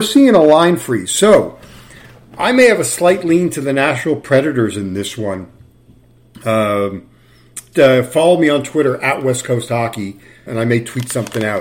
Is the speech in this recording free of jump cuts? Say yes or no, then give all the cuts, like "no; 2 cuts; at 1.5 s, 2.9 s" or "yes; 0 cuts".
no; 2 cuts; at 7.7 s, 10.5 s